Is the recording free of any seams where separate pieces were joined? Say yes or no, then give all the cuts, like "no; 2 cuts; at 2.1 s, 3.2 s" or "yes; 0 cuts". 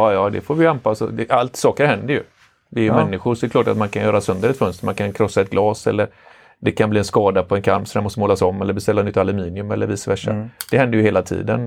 yes; 0 cuts